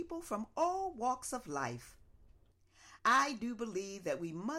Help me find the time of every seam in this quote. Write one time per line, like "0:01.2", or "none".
0:03.0